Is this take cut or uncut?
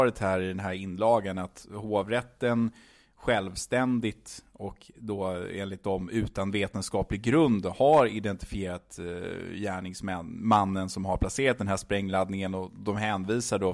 uncut